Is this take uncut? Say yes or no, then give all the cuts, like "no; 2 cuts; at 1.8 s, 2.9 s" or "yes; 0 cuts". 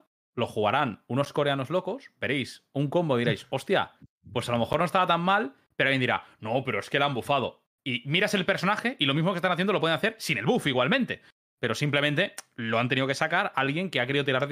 yes; 0 cuts